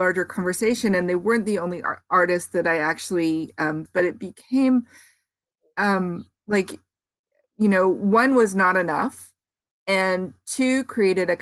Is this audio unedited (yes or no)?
no